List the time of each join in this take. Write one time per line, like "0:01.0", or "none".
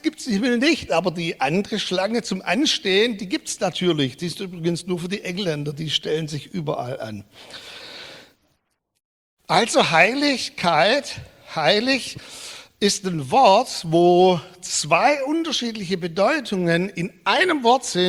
none